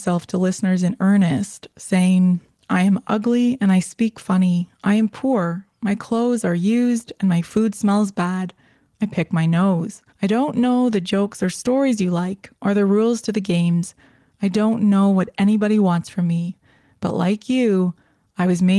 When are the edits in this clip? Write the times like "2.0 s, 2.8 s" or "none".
10.1 s